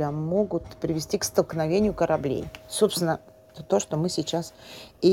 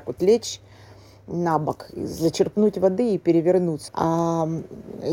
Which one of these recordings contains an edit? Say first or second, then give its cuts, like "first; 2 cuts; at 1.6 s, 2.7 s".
second; 1 cut; at 3.9 s